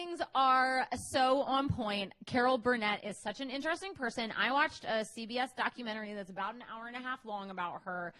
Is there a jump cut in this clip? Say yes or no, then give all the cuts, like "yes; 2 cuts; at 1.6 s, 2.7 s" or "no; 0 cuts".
no; 0 cuts